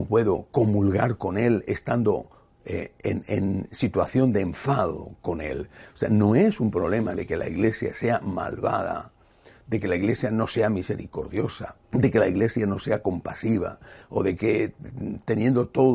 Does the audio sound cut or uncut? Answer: cut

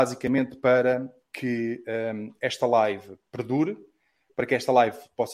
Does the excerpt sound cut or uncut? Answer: uncut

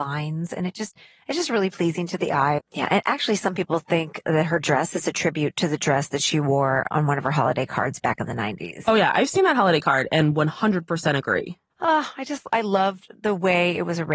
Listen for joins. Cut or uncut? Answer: cut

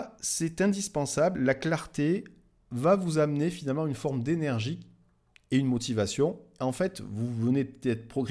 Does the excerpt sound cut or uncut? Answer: uncut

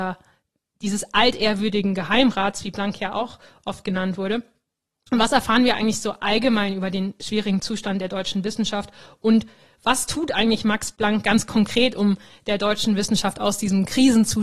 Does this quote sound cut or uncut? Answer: uncut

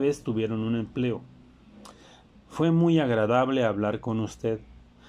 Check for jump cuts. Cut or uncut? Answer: cut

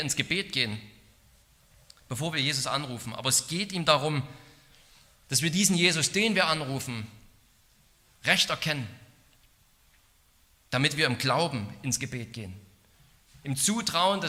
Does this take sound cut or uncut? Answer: uncut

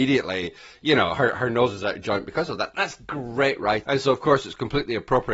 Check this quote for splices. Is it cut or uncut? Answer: cut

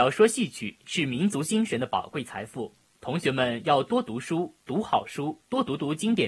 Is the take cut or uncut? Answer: uncut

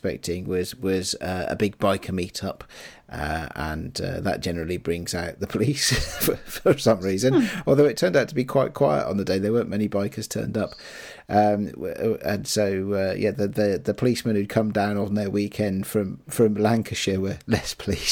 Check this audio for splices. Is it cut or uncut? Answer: uncut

